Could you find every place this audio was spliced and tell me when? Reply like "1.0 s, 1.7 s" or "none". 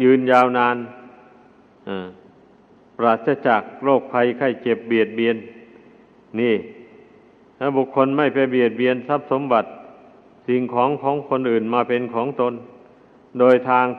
none